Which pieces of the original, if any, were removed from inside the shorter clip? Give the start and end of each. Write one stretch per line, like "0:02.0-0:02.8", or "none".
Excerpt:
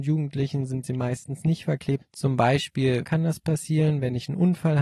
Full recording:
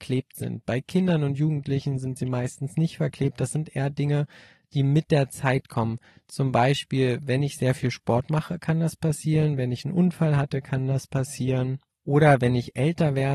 0:03.3-0:06.2
0:07.2-0:08.6